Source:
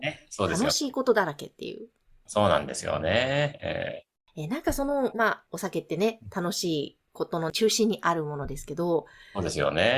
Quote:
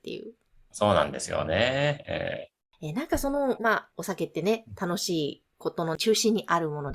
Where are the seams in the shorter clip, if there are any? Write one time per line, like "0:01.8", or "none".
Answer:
none